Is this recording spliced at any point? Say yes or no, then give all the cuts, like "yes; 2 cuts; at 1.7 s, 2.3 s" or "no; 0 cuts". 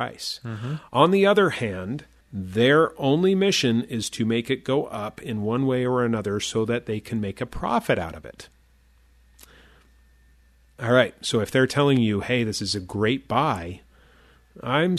yes; 1 cut; at 2.2 s